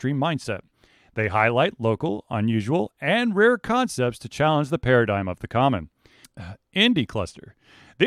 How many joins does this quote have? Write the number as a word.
one